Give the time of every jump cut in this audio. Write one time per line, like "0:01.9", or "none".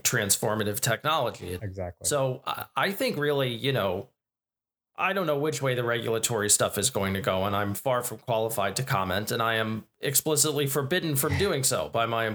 0:01.6

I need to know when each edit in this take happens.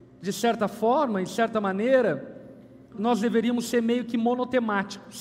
0:02.9

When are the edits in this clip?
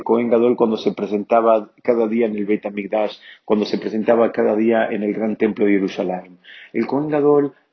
none

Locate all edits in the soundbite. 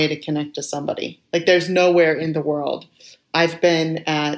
none

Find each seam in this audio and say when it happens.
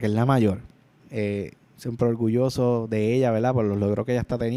0:01.0

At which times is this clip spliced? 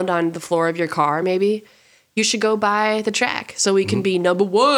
none

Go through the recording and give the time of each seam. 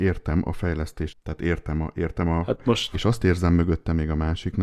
0:01.1
0:02.9

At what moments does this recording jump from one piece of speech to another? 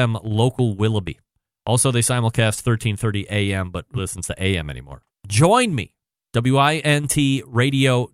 0:04.0
0:05.1

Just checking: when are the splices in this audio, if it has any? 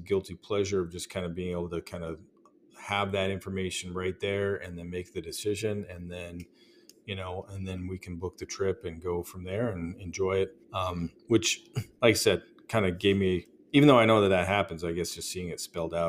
0:10.6

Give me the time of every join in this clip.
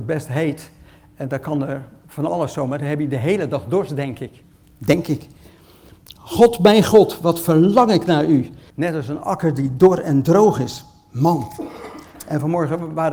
0:08.7

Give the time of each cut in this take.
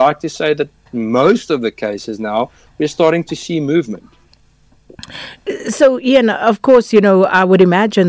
none

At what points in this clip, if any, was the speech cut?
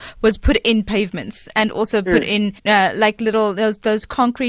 0:02.6

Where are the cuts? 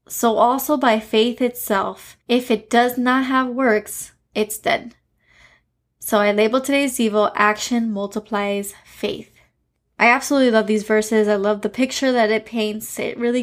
none

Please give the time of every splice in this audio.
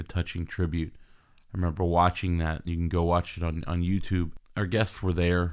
none

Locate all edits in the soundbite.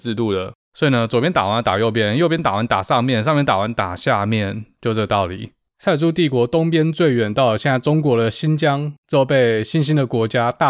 none

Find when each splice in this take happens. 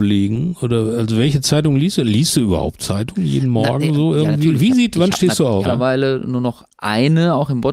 0:05.7

